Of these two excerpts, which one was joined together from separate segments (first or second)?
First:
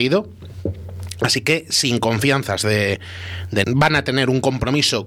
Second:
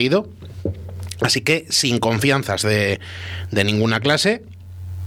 first